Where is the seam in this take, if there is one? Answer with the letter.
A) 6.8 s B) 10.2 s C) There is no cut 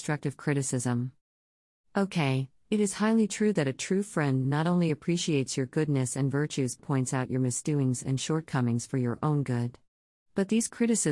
A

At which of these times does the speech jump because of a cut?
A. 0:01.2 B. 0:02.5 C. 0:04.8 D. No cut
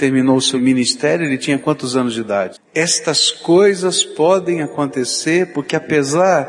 B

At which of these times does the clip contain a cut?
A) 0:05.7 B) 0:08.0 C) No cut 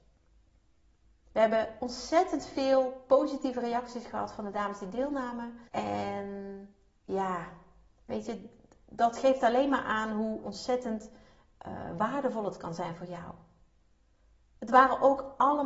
A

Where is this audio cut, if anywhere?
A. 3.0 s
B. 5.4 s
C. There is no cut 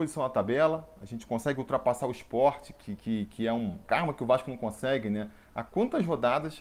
C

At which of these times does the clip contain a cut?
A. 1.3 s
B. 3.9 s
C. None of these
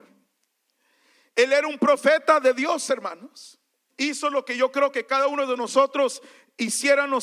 B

